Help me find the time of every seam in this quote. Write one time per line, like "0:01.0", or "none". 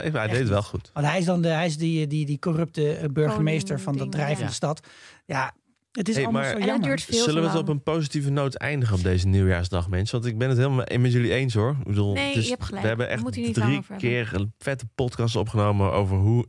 none

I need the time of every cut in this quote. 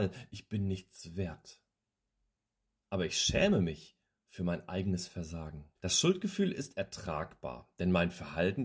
0:02.8
0:05.8

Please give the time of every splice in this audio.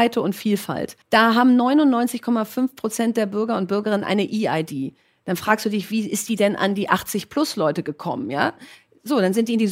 0:01.0

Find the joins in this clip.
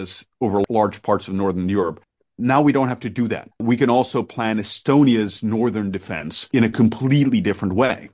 none

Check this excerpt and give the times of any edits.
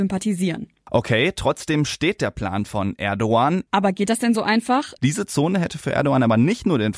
0:03.7
0:05.0

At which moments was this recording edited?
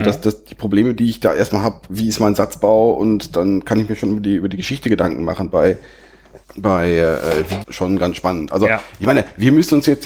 0:06.4
0:07.6

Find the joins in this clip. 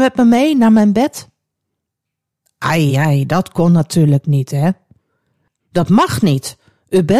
0:02.9
0:05.6

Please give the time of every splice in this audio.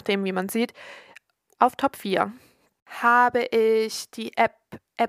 0:01.5

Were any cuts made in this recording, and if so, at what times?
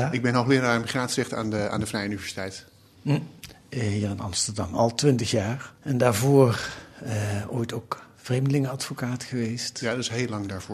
0:05.8

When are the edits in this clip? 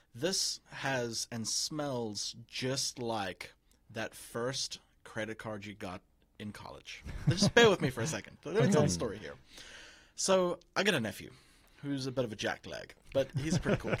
none

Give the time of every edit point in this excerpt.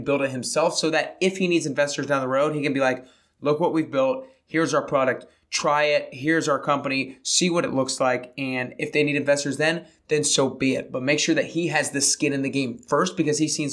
none

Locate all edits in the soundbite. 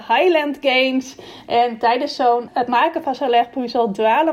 0:02.5

